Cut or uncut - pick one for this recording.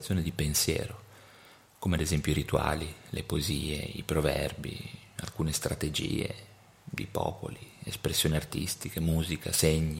uncut